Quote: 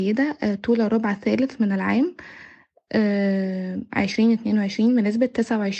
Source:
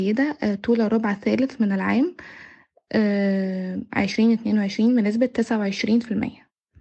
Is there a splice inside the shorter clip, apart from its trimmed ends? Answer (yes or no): no